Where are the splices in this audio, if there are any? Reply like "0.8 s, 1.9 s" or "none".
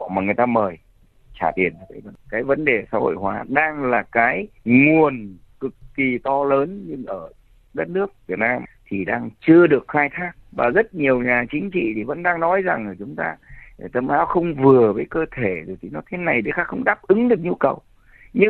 4.6 s, 10.4 s